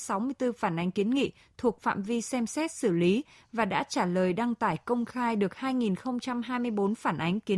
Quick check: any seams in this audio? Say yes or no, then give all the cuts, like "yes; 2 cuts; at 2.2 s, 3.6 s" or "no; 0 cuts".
no; 0 cuts